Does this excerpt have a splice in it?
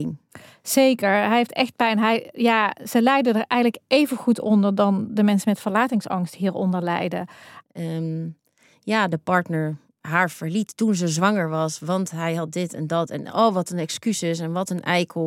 yes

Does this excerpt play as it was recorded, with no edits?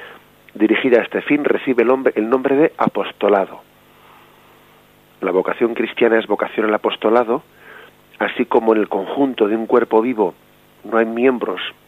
yes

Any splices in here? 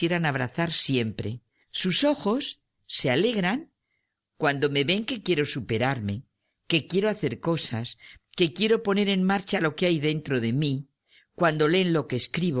yes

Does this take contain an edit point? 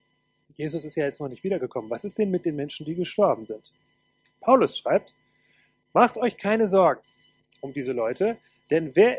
no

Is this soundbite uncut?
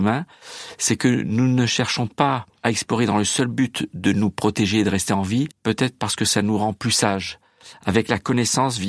no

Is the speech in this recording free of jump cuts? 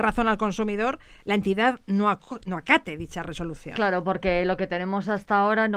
yes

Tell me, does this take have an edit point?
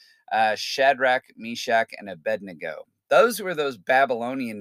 no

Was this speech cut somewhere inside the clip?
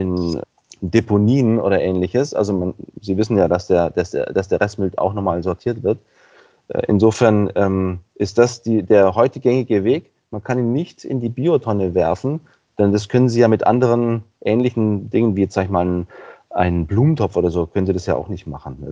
no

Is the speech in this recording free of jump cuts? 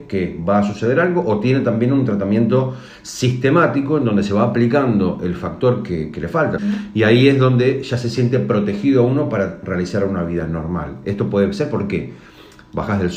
no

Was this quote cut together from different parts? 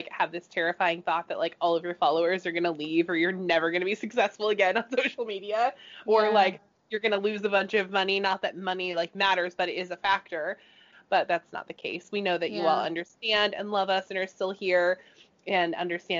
yes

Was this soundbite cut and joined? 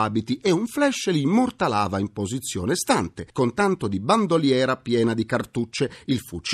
no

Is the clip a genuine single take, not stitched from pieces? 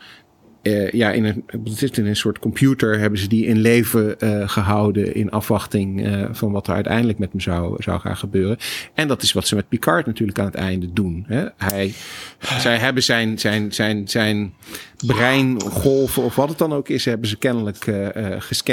yes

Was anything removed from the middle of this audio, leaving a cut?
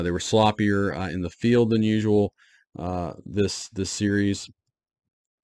no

